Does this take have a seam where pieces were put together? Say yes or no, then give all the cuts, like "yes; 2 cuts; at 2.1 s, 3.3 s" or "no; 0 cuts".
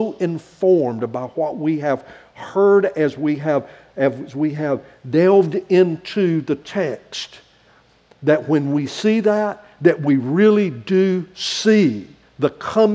no; 0 cuts